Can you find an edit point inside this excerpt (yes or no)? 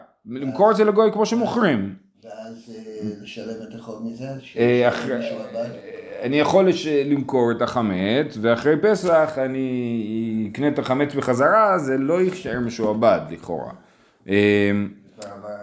no